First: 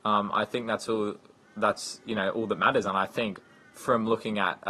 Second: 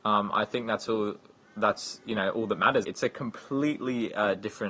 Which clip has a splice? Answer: second; 1 cut; at 2.8 s

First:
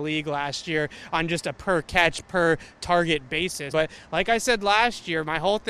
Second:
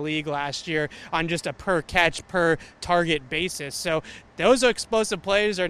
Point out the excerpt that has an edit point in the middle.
first; 1 cut; at 3.7 s

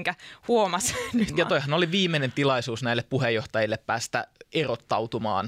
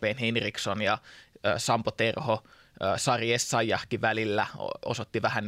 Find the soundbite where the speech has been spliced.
first; 1 cut; at 1.3 s

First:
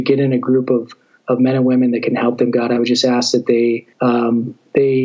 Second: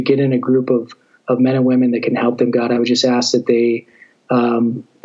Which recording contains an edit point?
first; 1 cut; at 3.9 s

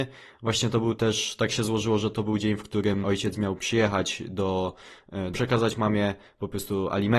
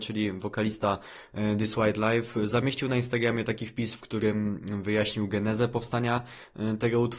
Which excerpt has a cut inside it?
first; 2 cuts; at 3.0 s, 5.3 s

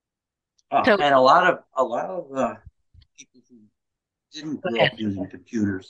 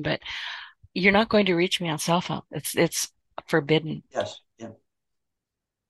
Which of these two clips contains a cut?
second; 1 cut; at 4.1 s

